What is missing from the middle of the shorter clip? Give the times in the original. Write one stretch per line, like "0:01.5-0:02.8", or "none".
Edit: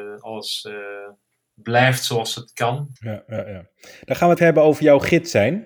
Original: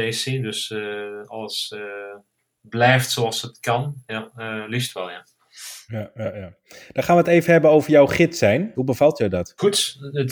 0:04.0-0:05.8
0:07.2-0:07.4